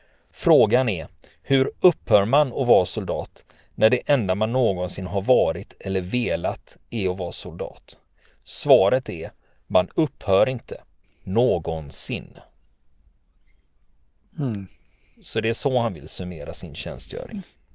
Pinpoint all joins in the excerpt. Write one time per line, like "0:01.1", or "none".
0:11.0